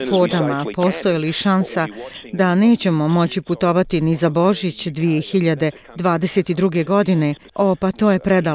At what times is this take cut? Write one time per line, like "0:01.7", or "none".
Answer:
0:07.5